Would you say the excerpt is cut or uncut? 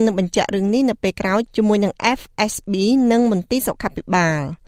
uncut